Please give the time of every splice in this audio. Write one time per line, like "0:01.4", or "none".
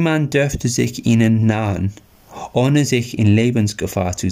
none